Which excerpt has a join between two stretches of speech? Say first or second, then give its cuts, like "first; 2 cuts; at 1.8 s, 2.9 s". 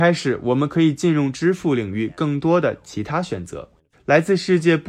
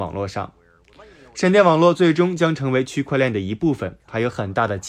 first; 1 cut; at 3.9 s